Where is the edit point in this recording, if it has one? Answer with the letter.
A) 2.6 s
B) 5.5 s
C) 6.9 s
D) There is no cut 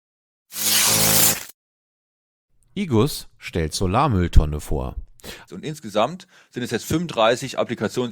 B